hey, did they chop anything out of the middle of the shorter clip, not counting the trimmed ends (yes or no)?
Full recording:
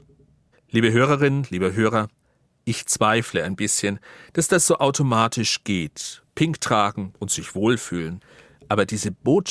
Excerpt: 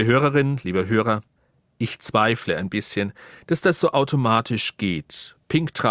no